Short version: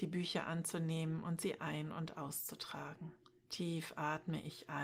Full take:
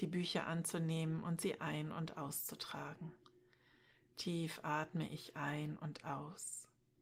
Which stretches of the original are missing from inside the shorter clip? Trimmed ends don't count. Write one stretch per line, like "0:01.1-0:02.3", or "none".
0:03.4-0:04.0